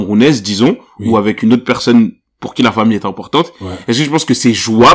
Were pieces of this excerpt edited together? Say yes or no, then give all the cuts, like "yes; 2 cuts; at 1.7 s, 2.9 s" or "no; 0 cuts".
no; 0 cuts